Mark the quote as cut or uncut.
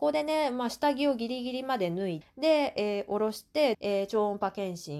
cut